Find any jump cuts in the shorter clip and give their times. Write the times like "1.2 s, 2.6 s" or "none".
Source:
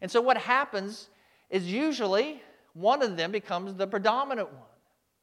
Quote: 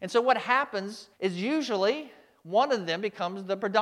1.1 s